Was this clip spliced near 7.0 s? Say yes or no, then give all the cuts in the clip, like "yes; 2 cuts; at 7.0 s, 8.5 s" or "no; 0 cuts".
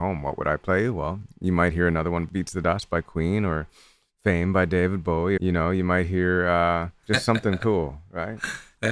yes; 2 cuts; at 5.4 s, 7.0 s